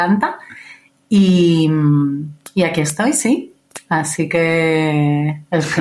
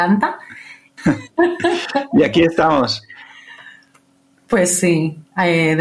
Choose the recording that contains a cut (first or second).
second